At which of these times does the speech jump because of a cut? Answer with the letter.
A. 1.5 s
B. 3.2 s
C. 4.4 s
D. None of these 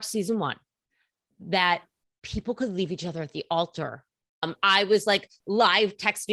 C